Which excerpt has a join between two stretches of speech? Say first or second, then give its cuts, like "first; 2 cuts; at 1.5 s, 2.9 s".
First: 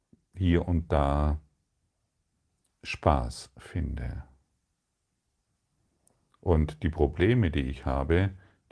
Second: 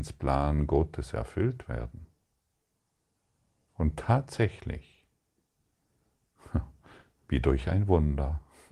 second; 1 cut; at 3.7 s